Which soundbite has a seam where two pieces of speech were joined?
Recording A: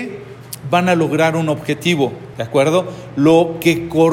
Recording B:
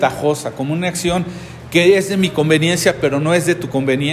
A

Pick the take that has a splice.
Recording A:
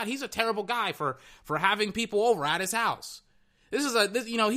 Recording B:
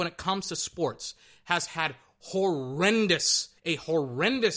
B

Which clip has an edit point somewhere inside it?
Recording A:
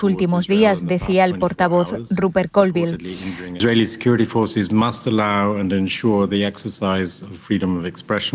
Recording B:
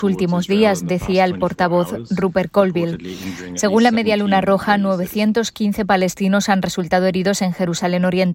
A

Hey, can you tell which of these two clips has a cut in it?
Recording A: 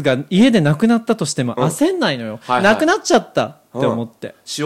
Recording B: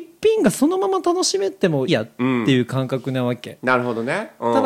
B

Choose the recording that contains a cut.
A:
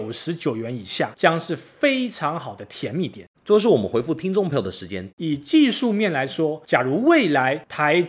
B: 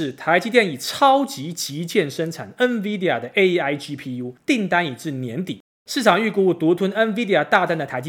A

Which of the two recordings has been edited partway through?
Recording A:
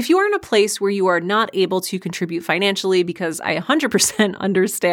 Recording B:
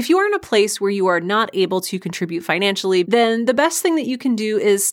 B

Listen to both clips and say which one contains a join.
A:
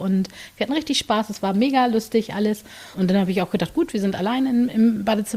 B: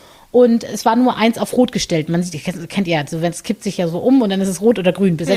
A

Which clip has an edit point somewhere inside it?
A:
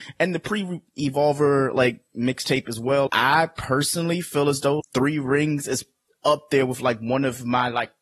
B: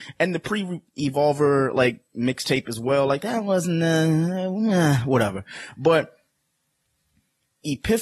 A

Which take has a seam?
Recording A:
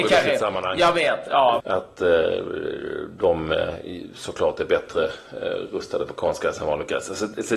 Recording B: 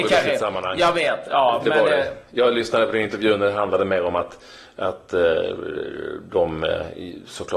A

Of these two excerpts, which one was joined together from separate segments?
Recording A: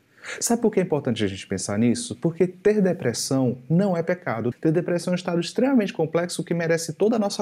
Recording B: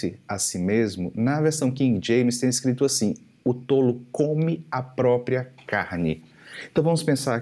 A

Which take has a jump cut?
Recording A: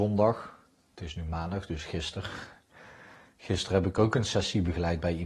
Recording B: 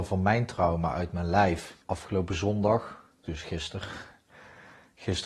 B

